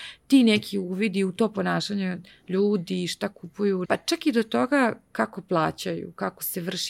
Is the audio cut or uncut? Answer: cut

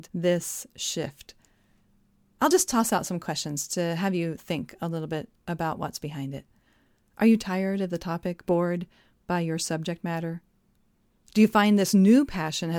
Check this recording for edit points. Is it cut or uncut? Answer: uncut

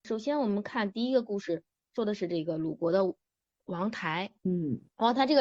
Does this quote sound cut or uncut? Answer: cut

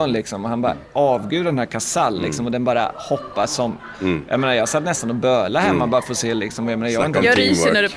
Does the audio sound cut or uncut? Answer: uncut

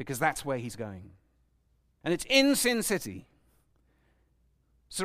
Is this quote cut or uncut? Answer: cut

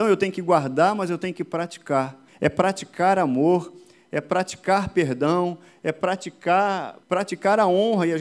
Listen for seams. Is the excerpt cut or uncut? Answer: cut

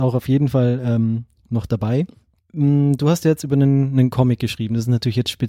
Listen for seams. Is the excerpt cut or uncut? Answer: uncut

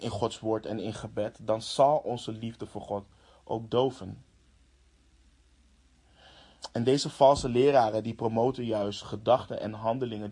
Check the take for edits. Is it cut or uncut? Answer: uncut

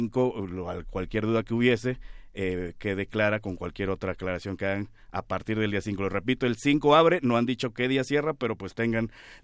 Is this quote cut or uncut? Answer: uncut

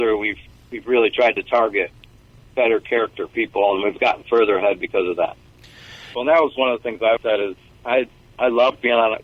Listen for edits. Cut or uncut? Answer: cut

